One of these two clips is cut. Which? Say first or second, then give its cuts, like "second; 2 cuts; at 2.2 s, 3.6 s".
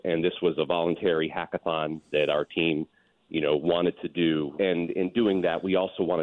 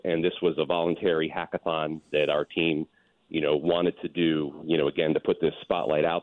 first; 1 cut; at 4.6 s